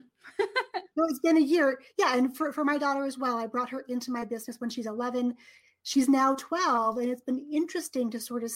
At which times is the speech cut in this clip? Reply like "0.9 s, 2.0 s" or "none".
none